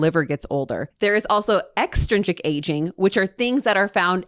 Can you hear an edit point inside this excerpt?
no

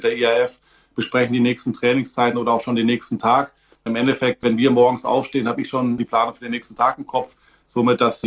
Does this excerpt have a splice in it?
no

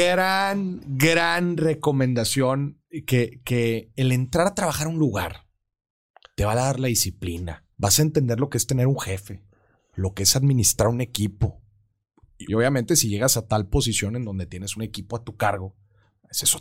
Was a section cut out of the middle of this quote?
yes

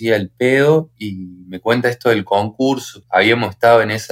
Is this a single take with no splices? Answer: no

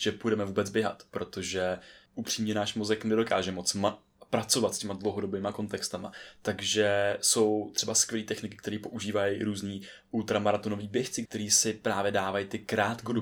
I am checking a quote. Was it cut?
yes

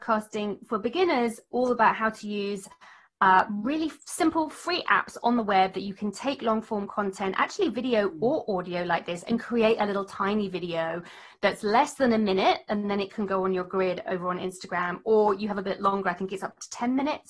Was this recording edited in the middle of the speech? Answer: no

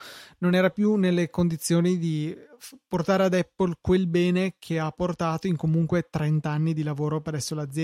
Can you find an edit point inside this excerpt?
no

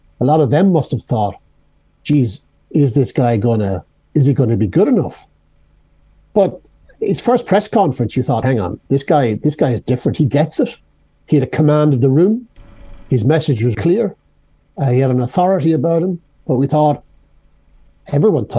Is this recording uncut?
no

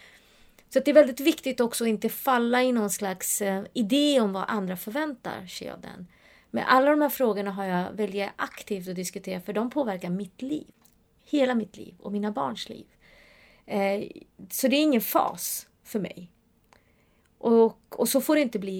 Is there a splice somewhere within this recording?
no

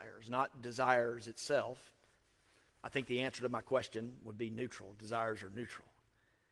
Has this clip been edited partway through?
no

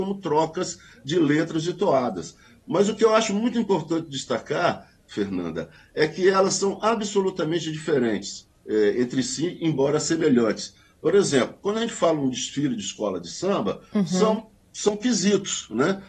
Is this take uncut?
yes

